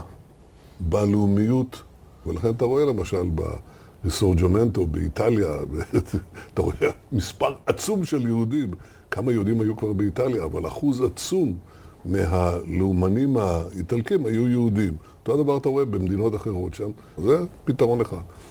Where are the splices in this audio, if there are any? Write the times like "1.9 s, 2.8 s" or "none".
2.3 s, 17.2 s